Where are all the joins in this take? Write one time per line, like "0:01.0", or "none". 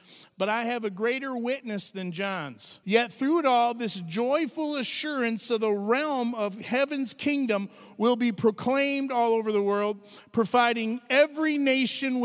0:02.8